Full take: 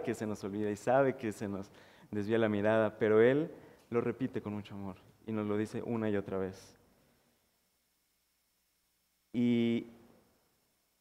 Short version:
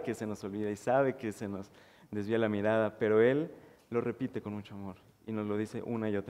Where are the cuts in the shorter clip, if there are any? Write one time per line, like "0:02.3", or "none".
none